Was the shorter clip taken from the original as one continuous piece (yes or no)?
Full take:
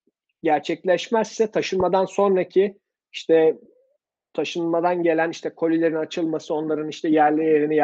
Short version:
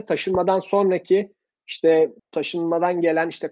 no